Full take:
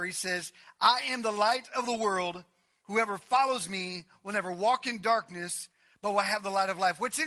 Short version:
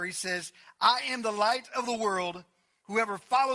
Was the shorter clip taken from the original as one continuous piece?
yes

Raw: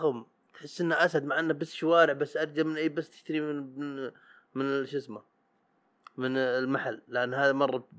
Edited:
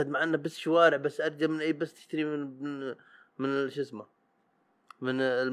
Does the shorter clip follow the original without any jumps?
yes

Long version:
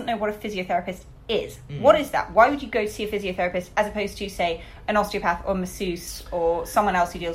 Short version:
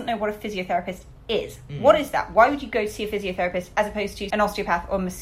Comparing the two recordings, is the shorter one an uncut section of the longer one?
no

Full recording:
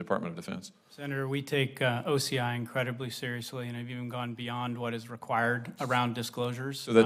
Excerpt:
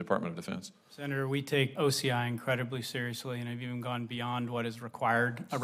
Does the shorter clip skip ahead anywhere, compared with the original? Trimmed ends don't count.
yes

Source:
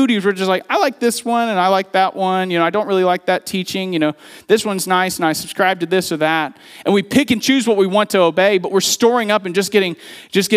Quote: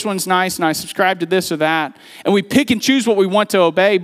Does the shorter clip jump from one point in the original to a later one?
no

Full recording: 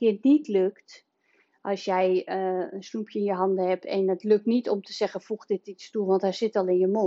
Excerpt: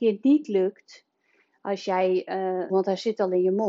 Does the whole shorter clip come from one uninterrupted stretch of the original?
no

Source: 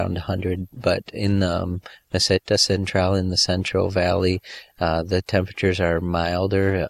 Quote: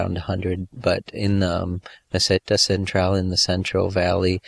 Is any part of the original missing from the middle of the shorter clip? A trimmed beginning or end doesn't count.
no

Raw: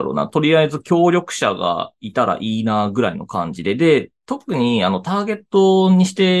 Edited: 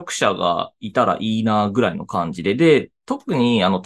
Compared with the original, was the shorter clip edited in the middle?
no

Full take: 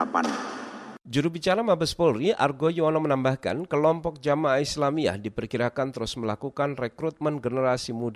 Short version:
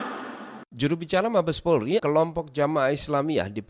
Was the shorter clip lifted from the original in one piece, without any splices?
no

